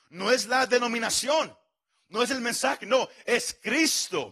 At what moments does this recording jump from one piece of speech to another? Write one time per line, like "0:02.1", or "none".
none